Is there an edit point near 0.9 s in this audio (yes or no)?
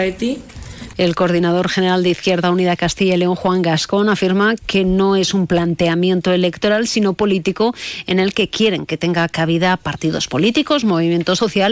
yes